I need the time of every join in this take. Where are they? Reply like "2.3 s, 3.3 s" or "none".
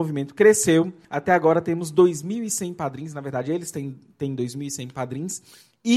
none